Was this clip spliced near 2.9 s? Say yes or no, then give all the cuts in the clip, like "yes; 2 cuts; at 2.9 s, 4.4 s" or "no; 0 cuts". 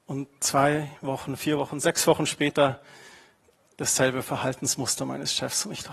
no; 0 cuts